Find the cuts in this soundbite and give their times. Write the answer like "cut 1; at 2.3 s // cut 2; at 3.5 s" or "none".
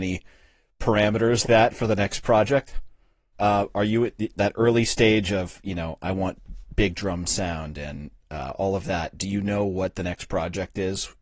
cut 1; at 1.4 s // cut 2; at 3.3 s

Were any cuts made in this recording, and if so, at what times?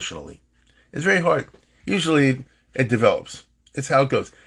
cut 1; at 1.8 s

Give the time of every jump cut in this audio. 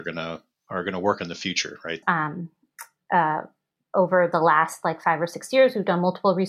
cut 1; at 2.0 s

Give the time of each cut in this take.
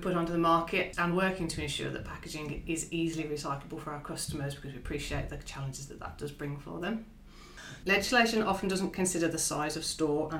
cut 1; at 7.8 s

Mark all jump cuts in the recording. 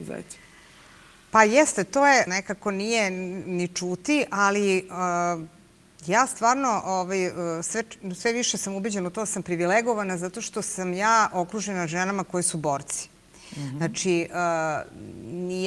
cut 1; at 2.3 s // cut 2; at 3.4 s

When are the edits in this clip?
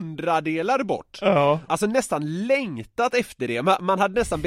cut 1; at 1.7 s

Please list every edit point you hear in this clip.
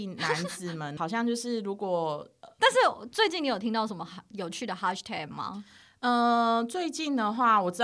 cut 1; at 2.6 s

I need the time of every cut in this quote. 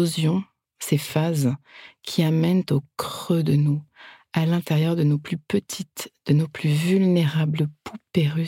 none

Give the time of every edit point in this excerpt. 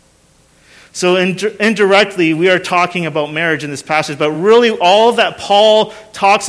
none

